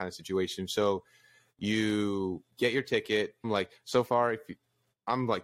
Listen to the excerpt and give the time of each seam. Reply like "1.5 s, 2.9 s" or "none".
3.4 s